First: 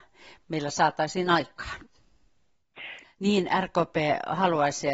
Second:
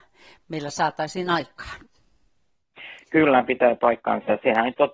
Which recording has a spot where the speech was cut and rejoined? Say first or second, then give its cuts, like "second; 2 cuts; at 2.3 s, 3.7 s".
first; 1 cut; at 3.0 s